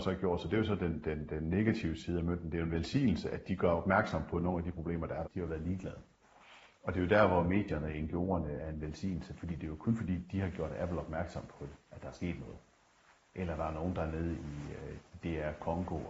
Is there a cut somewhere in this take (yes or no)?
yes